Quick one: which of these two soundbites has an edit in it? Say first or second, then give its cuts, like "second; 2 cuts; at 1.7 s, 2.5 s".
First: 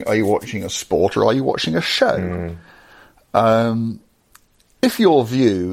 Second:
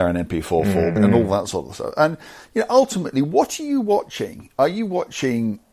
second; 1 cut; at 1.0 s